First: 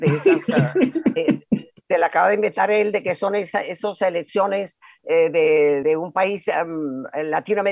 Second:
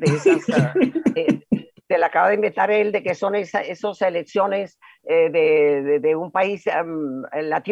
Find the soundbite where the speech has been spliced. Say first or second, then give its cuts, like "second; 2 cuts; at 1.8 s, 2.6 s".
first; 1 cut; at 5.8 s